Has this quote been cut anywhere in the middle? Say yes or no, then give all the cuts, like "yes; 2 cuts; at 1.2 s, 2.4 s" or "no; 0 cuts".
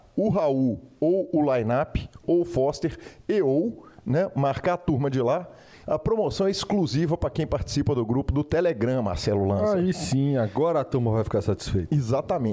yes; 2 cuts; at 2.2 s, 5.8 s